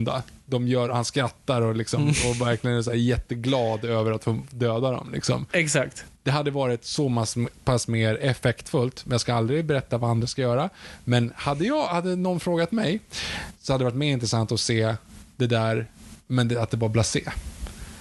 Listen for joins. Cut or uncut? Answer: uncut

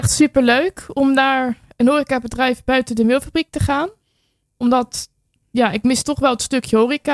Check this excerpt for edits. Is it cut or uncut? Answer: uncut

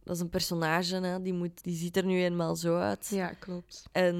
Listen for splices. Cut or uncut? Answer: cut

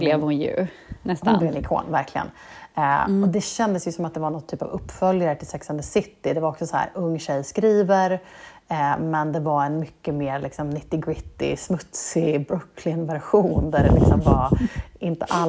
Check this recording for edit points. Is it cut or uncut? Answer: uncut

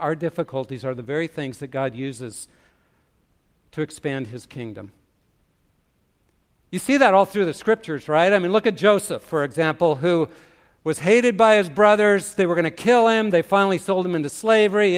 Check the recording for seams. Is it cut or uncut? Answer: uncut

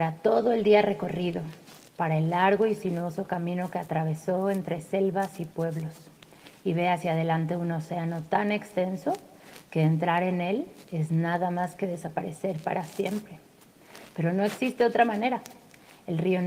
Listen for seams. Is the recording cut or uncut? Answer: cut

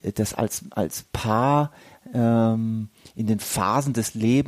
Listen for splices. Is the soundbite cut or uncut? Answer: uncut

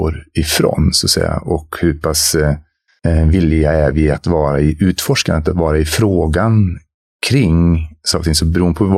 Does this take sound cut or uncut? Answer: uncut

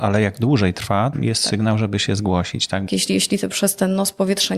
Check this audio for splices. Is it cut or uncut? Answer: cut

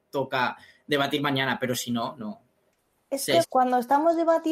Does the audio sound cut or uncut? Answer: cut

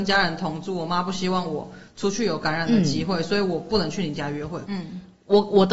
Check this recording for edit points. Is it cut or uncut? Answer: cut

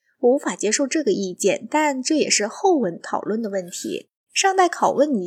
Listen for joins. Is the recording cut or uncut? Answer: cut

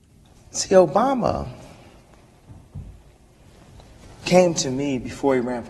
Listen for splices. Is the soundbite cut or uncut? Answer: uncut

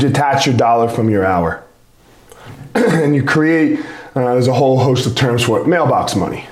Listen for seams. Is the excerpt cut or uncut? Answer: cut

